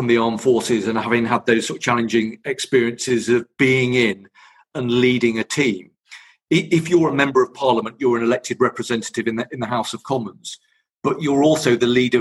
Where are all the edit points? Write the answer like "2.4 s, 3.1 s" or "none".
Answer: none